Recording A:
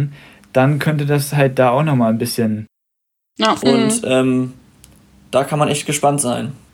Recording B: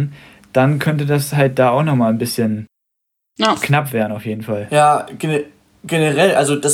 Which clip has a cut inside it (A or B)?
A